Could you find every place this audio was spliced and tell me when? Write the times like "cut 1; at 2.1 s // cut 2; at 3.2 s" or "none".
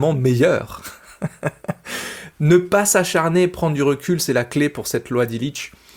cut 1; at 2.3 s